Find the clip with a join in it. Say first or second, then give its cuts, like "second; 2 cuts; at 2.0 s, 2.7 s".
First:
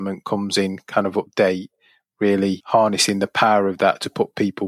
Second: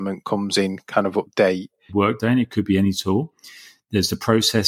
second; 1 cut; at 1.9 s